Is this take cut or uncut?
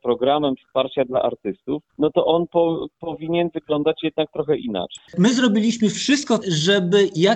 cut